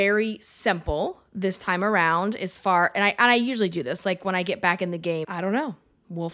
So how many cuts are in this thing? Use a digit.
1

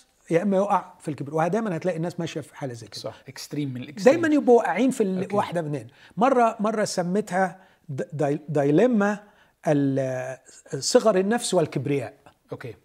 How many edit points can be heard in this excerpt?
1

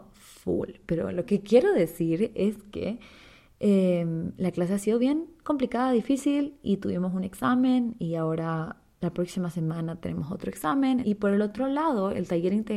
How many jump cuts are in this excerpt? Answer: 1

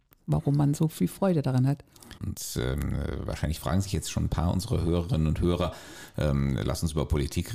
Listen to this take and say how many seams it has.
1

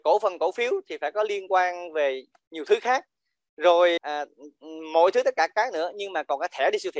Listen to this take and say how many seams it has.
1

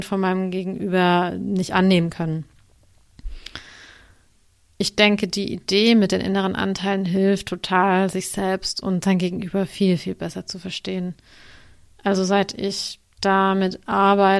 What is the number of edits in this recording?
0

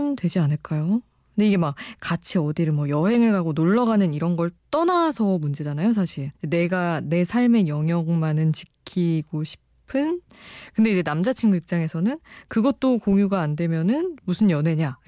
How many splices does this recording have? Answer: 2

